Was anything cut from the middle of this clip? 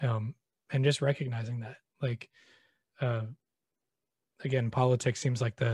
yes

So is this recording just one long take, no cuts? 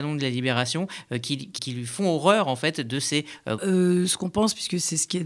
no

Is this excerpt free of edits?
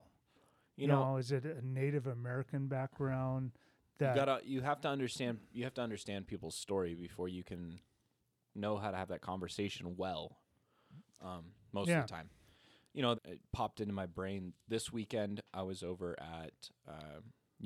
no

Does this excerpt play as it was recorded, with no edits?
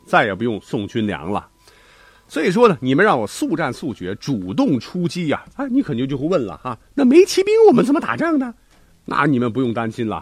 no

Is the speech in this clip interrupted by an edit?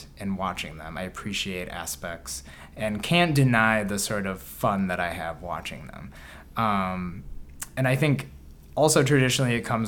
no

